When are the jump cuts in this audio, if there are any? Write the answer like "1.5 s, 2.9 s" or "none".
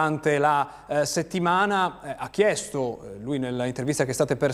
none